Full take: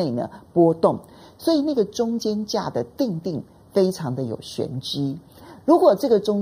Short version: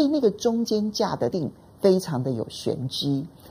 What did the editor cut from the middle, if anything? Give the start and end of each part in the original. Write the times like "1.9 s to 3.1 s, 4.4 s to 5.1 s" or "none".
2.8 s to 3.2 s